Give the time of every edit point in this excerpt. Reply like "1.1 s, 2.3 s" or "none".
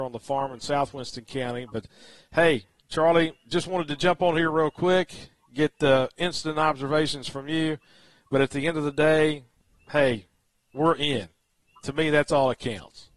none